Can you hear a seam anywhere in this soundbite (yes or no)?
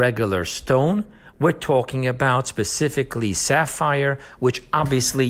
no